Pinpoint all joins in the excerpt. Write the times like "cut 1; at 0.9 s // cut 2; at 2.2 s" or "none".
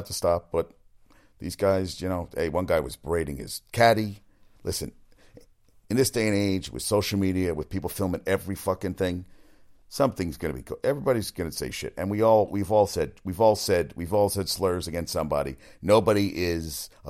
none